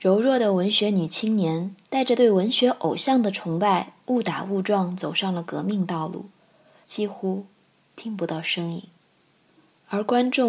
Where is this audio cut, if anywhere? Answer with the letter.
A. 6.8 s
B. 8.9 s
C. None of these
A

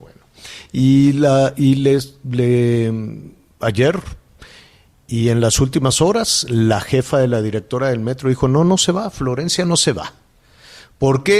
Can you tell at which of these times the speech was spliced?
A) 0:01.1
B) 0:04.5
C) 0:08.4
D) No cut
D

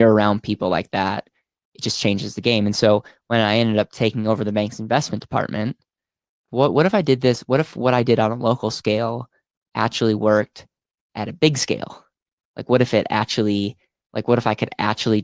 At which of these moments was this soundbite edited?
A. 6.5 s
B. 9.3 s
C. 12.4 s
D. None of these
A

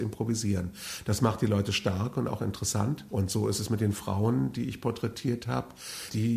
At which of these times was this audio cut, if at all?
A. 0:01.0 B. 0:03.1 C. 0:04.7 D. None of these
B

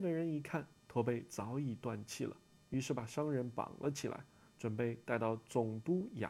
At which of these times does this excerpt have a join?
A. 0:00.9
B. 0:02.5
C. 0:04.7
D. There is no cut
D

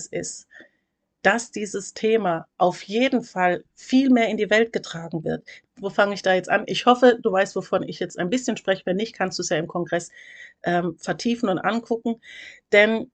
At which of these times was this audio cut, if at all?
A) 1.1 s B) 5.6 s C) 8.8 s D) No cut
B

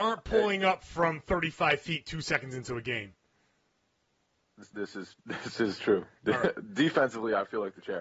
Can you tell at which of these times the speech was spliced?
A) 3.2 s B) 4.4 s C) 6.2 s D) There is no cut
D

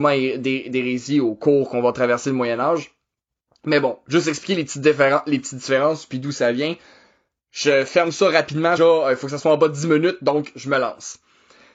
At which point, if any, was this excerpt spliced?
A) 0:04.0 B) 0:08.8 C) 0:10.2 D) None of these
B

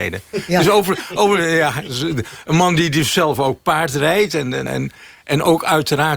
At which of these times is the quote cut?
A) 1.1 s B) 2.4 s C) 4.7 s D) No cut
C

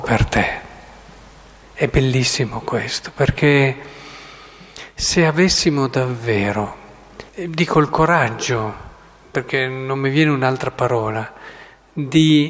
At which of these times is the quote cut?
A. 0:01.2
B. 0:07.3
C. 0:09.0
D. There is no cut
B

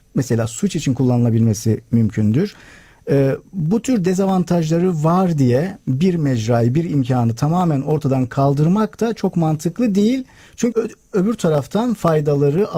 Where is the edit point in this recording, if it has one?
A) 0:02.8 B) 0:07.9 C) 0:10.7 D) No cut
C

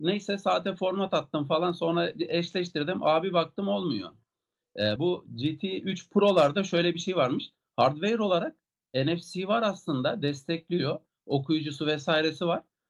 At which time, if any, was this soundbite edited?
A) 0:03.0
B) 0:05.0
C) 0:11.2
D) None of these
B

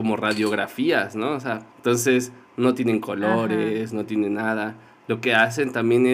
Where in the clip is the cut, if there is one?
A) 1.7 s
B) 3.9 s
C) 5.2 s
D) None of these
A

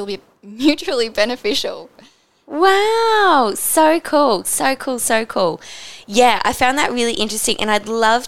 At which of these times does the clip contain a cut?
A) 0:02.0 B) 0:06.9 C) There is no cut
C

